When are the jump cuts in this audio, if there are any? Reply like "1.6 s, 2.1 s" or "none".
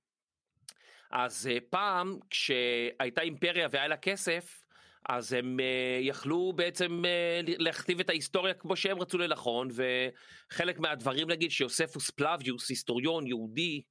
none